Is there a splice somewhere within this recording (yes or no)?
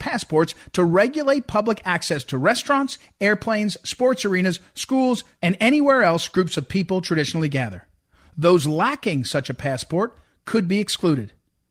yes